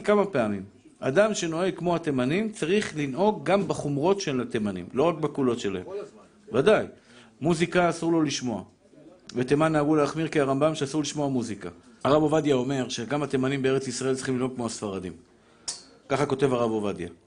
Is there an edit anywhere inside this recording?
yes; 1 cut; at 12.0 s

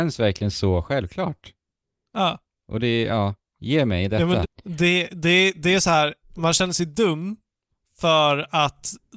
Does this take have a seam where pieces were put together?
yes; 1 cut; at 4.4 s

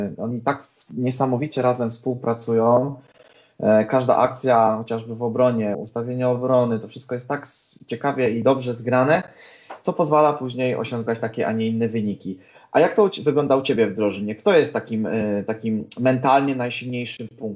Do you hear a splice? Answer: yes; 1 cut; at 5.7 s

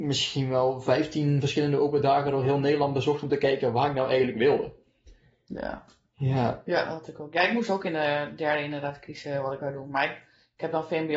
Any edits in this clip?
no; 0 cuts

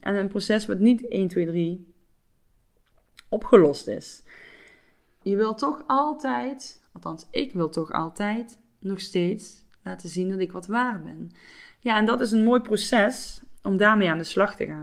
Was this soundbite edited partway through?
yes; 1 cut; at 5.2 s

